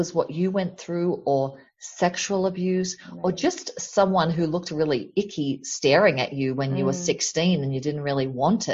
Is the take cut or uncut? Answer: uncut